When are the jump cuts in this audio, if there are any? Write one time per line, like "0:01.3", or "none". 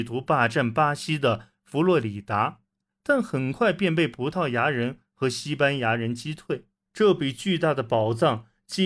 0:06.9